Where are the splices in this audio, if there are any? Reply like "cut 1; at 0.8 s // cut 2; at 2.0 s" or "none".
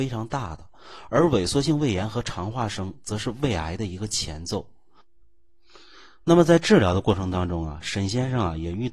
none